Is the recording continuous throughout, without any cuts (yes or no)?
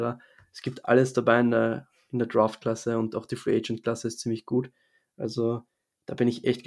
yes